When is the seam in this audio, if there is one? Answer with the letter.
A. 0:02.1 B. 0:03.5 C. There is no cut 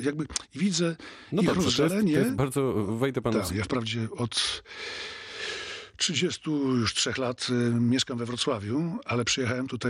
B